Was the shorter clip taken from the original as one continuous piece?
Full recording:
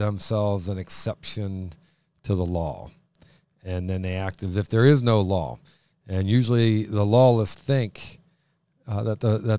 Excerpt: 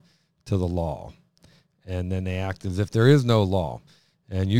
yes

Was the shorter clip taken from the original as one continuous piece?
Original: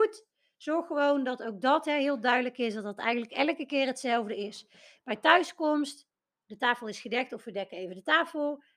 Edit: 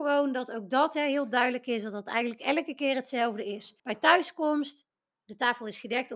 no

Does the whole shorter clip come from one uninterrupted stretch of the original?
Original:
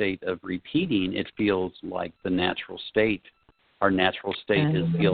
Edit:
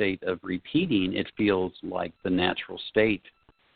yes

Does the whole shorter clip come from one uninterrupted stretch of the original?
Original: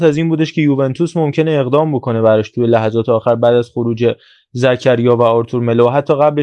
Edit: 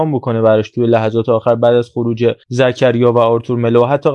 no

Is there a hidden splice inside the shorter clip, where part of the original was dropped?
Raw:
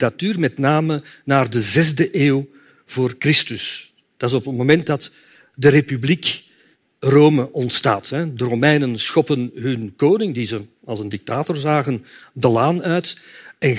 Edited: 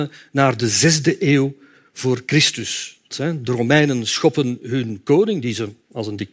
yes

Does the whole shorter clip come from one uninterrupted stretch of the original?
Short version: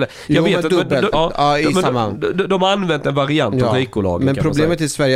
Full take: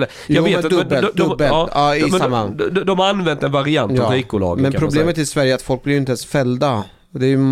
no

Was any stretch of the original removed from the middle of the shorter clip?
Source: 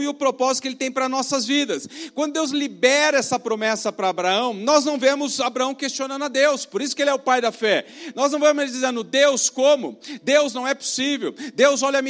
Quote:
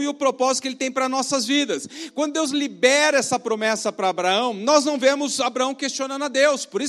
no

